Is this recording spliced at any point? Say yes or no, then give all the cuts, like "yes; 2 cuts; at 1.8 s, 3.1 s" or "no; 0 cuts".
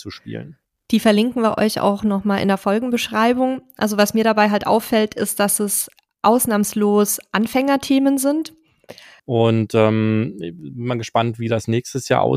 yes; 1 cut; at 9.2 s